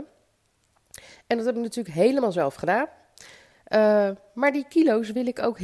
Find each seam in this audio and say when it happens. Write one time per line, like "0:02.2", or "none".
none

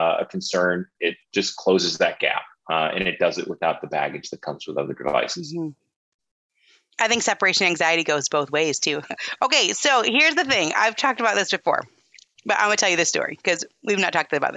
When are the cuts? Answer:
0:09.1

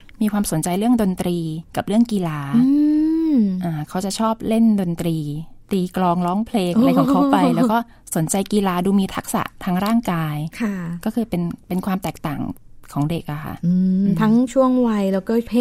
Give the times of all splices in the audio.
0:01.7
0:05.6

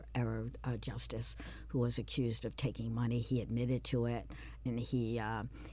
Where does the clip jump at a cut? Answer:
0:04.7

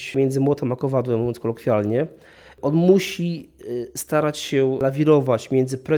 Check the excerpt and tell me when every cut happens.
none

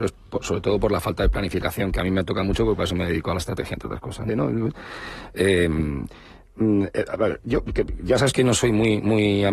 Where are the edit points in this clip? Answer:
0:04.3

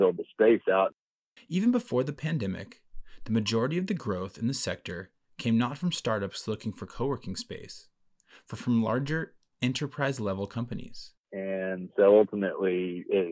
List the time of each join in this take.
0:01.4
0:11.2

